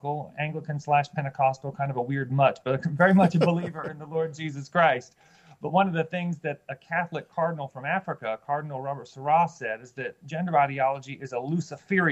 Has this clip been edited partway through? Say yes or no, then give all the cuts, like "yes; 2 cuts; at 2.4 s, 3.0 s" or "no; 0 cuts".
no; 0 cuts